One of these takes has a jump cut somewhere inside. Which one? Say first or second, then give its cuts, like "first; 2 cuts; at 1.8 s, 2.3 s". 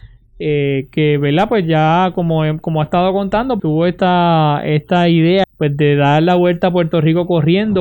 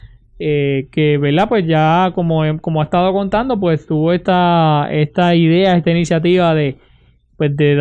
first; 2 cuts; at 3.6 s, 5.4 s